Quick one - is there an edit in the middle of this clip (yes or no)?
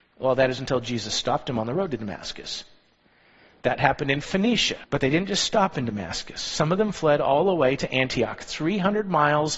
yes